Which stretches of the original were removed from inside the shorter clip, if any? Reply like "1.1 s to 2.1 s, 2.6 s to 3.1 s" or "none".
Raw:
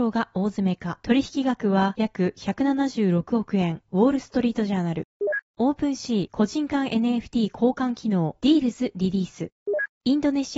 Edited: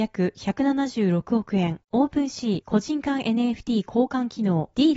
3.8 s to 5.5 s